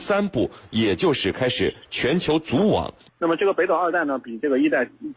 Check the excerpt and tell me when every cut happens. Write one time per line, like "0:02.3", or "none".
0:03.1